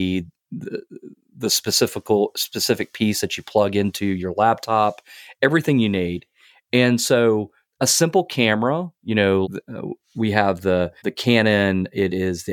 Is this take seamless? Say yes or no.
no